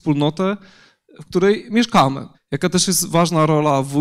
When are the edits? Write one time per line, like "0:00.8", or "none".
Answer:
0:02.3